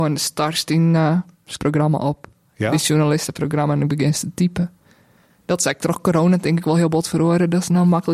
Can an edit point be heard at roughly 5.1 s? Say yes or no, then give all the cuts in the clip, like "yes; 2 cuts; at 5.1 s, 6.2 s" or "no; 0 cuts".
no; 1 cut; at 1.6 s